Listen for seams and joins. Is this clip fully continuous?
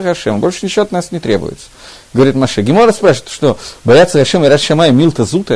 yes; 0 cuts

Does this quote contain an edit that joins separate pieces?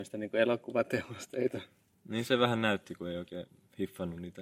no; 0 cuts

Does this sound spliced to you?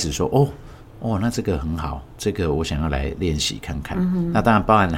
no; 0 cuts

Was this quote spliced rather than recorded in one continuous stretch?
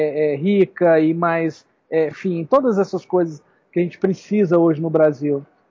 yes; 1 cut; at 2.1 s

